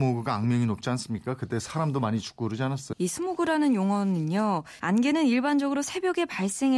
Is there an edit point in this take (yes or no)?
yes